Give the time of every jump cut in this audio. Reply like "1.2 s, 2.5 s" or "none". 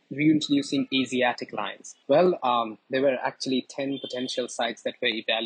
2.0 s

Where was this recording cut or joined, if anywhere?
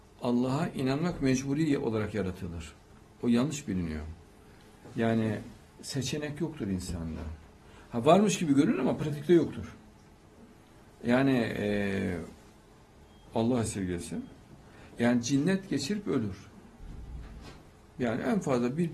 13.2 s, 14.9 s

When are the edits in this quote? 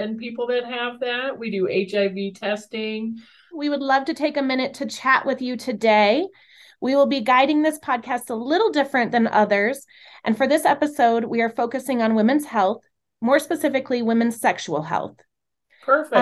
3.5 s

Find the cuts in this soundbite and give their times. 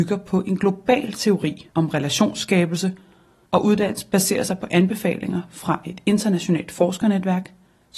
none

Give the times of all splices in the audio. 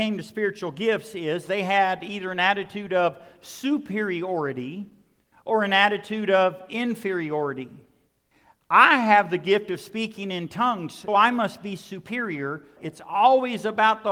11.1 s, 12.8 s

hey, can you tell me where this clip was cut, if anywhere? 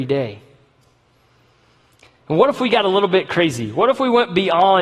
none

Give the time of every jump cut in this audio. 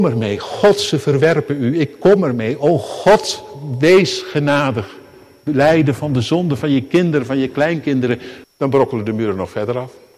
8.4 s

